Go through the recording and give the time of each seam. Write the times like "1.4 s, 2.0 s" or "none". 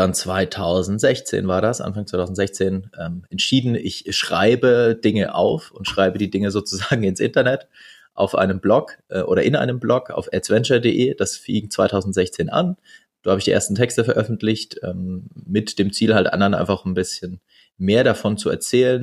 none